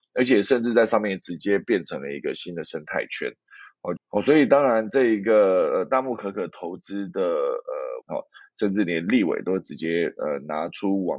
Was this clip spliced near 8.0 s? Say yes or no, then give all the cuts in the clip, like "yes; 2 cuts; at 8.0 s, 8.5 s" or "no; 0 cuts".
yes; 2 cuts; at 4.0 s, 8.0 s